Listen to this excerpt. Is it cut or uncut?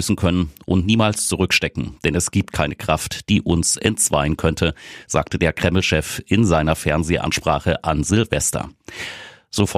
uncut